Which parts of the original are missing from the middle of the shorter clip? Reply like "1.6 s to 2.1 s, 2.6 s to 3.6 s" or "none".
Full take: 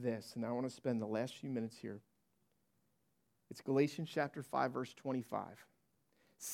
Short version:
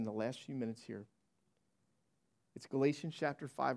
none

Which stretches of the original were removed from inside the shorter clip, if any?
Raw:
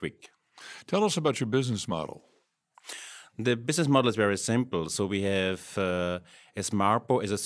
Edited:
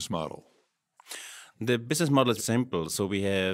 4.1 s to 4.4 s

